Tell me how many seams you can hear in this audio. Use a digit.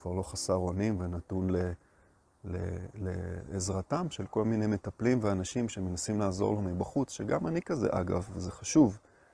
0